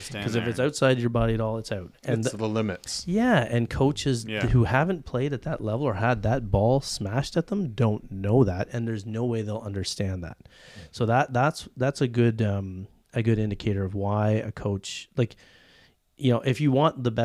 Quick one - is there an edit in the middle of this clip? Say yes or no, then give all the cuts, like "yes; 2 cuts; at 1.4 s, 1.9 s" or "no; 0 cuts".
no; 0 cuts